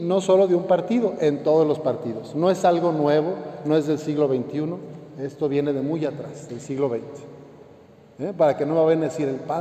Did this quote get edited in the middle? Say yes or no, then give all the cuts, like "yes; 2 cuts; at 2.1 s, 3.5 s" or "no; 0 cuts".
no; 0 cuts